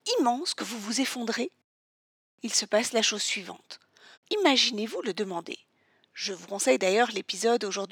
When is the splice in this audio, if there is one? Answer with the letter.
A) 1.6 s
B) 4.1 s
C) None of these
B